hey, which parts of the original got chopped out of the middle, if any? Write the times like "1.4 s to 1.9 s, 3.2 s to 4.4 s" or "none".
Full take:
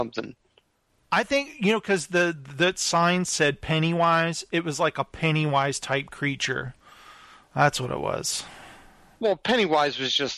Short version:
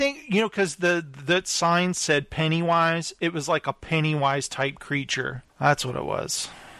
6.8 s to 7.4 s